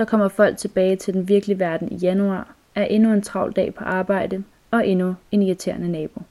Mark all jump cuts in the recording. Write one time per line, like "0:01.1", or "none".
0:04.5